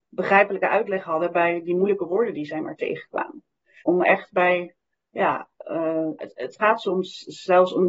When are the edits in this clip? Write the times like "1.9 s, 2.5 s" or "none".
3.8 s, 6.2 s